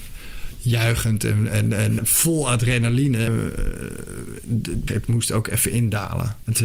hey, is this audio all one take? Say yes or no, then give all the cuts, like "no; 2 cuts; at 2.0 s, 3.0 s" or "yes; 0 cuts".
no; 3 cuts; at 2.0 s, 3.3 s, 4.9 s